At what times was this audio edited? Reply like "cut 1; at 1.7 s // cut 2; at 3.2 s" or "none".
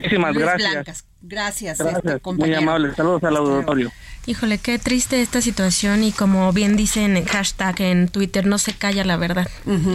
cut 1; at 4.3 s